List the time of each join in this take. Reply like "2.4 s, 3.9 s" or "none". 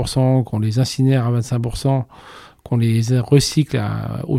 none